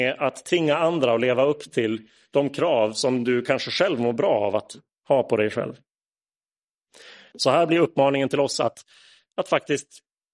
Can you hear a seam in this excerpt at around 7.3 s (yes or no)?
yes